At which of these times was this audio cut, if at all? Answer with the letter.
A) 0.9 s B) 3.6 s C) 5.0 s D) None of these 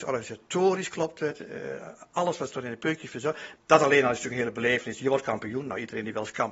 B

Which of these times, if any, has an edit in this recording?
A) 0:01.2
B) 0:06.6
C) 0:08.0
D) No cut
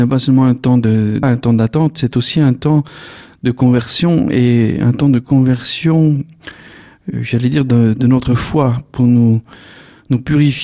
A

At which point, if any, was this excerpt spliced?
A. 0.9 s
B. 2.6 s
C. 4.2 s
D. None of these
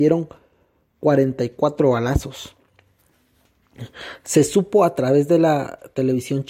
D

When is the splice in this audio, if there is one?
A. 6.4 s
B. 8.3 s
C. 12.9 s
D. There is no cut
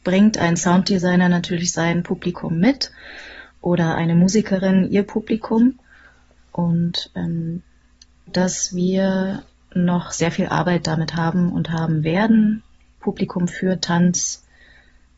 B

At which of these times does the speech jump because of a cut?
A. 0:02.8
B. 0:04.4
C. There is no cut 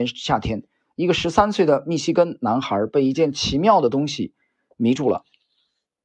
C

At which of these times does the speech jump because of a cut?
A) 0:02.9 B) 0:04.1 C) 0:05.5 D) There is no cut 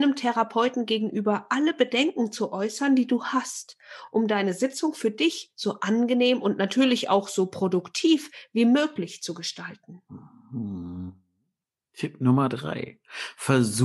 D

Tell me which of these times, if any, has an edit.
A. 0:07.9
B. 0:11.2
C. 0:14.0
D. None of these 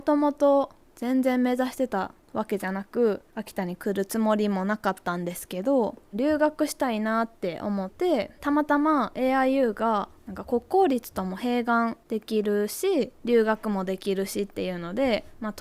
A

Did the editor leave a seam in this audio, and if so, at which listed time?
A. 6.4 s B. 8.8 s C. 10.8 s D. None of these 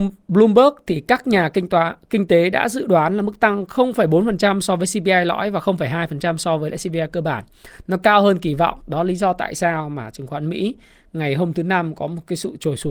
D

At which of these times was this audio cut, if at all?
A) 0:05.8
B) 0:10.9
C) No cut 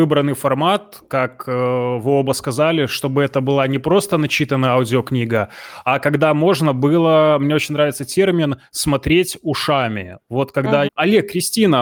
B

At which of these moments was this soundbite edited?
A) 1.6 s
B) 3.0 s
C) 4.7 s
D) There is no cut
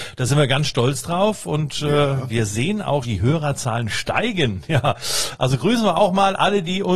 B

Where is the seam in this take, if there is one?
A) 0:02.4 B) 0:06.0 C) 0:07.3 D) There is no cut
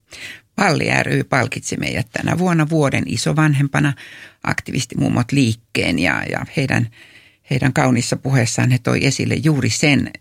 D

